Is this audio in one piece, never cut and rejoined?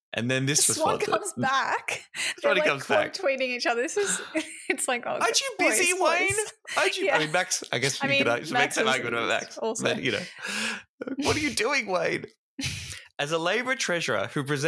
yes; 0 cuts

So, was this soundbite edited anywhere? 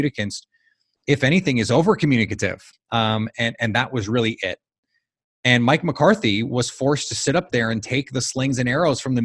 yes; 1 cut; at 2.7 s

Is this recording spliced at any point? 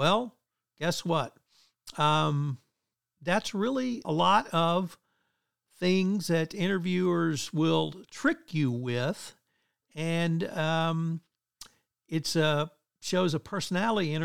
yes; 1 cut; at 4.0 s

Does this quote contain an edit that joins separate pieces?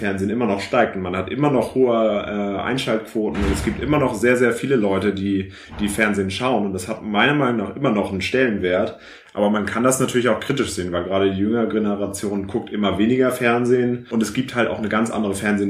no; 0 cuts

